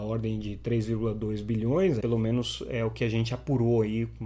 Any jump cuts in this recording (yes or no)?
yes